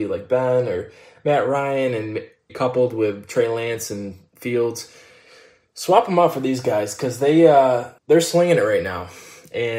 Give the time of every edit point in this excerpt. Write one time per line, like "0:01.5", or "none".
0:02.5
0:08.0